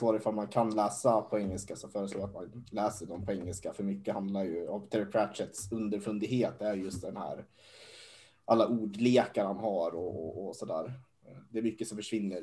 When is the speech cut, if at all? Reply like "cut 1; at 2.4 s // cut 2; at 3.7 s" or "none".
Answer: none